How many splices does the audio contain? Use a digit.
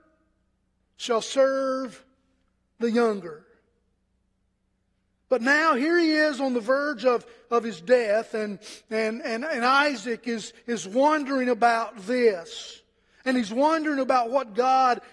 0